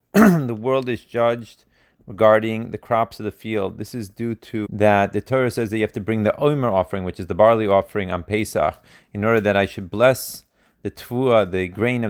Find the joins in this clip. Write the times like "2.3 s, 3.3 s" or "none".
4.6 s